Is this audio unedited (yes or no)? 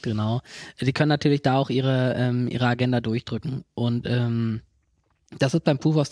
yes